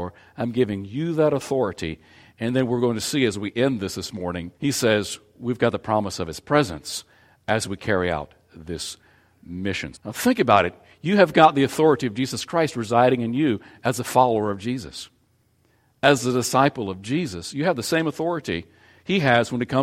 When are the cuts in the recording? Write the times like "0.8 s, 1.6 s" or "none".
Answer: 4.6 s, 9.9 s